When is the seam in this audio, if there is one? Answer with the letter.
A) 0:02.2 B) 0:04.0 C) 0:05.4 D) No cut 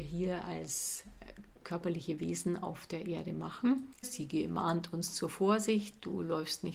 B